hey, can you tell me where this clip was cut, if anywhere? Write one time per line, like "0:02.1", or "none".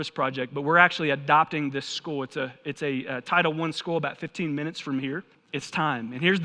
0:05.3

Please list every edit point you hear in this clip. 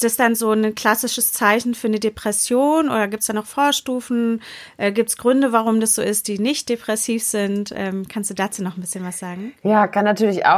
none

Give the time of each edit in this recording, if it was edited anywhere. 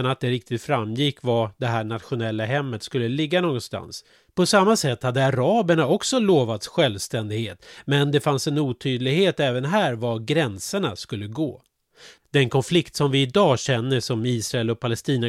none

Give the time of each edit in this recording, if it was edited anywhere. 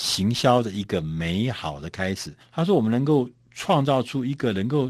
0:02.4

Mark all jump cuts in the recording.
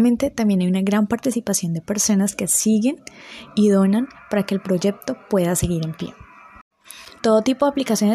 0:07.2

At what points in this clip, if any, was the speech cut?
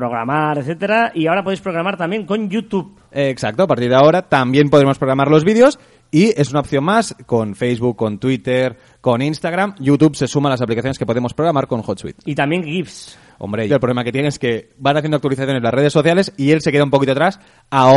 0:13.7

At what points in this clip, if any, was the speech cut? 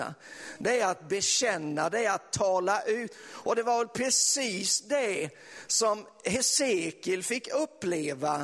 none

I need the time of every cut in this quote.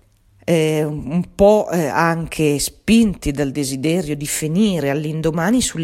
none

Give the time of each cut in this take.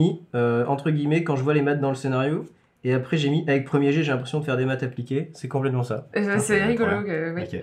none

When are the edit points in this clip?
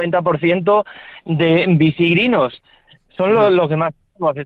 none

